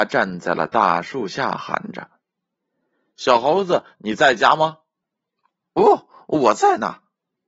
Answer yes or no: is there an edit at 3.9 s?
yes